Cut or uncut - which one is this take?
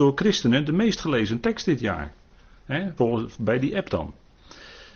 cut